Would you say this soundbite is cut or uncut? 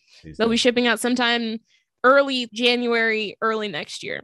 cut